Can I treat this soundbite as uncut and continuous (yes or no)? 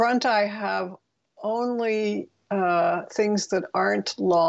yes